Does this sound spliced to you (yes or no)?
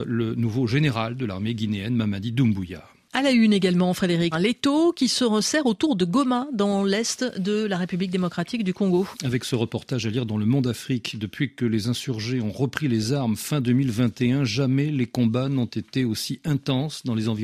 yes